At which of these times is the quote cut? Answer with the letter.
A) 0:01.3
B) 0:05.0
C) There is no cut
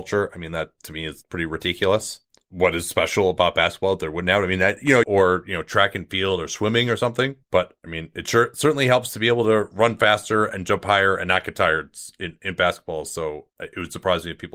B